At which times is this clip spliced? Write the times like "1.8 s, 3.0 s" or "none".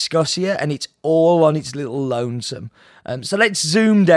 none

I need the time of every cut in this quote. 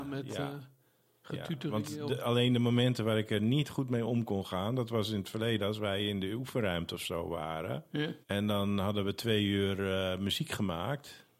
8.2 s

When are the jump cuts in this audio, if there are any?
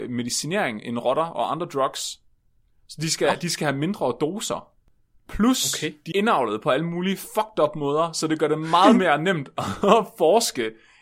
6.1 s

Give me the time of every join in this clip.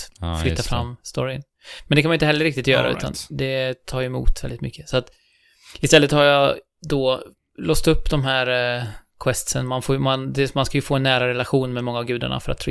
none

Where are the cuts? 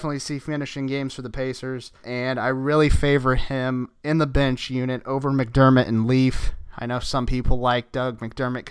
2.0 s

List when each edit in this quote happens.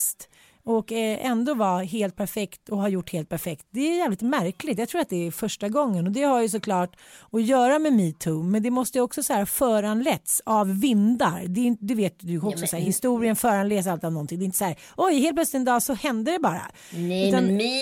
none

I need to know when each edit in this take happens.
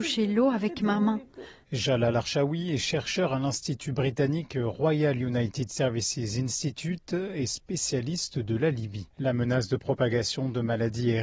1.6 s, 9.1 s

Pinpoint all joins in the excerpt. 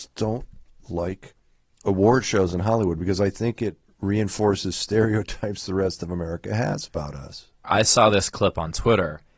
7.6 s

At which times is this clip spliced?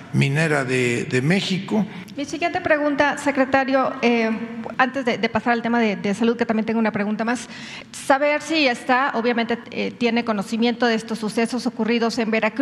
2.1 s

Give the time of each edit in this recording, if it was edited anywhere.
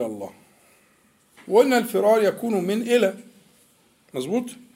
1.3 s

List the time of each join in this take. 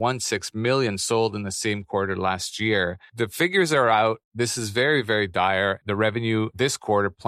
5.8 s

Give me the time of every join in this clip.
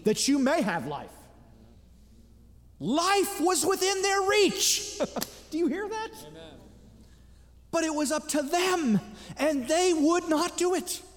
none

